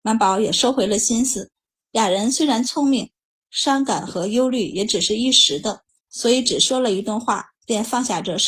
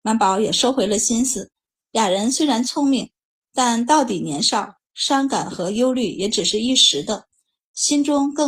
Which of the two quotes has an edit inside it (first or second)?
first